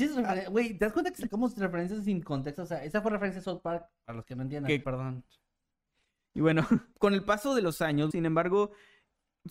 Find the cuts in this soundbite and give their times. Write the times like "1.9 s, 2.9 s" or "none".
4.8 s, 6.9 s, 8.1 s